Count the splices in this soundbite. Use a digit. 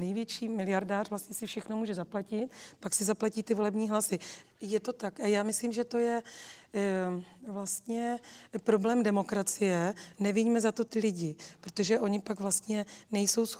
2